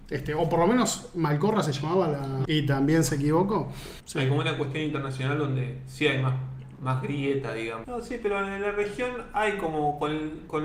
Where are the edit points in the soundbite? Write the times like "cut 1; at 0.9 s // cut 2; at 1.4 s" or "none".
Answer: cut 1; at 2.4 s // cut 2; at 4.0 s // cut 3; at 7.8 s

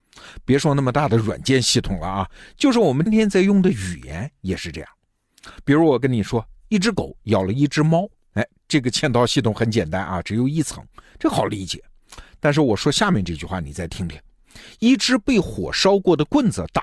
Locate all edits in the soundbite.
cut 1; at 3.1 s

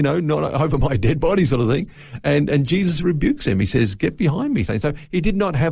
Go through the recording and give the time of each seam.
none

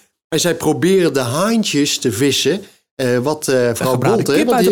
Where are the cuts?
none

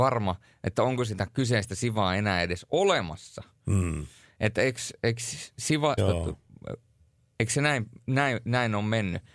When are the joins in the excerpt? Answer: cut 1; at 6.0 s

